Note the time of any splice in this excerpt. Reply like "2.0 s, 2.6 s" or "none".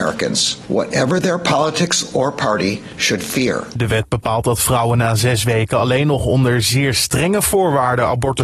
none